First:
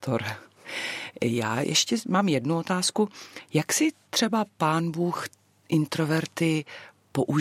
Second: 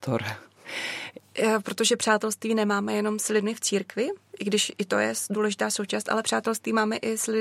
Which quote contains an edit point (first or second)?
second